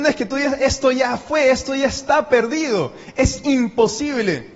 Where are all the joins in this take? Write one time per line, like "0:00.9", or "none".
none

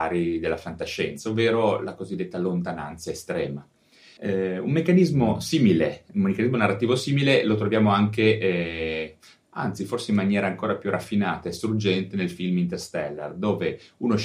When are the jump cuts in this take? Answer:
0:04.2

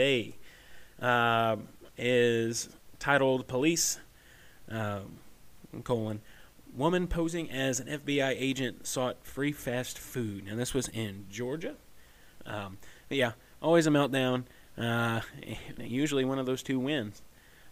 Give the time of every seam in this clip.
0:12.4
0:15.8

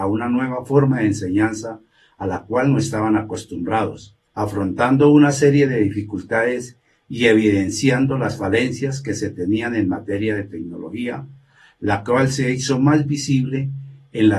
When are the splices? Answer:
0:04.3

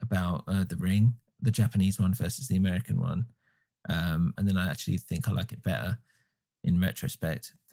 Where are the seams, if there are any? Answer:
0:04.4

